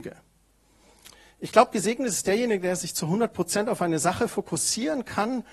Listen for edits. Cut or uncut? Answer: uncut